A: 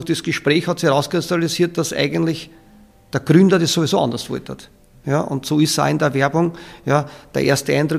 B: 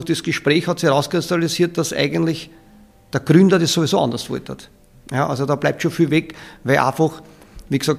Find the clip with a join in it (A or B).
A